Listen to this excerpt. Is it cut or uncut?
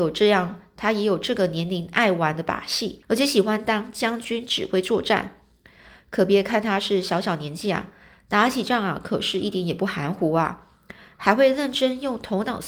cut